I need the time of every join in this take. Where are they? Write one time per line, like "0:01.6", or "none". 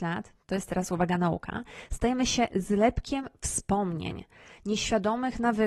none